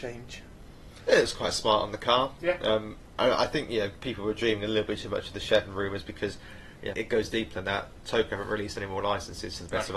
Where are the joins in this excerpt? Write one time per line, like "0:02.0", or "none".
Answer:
0:06.9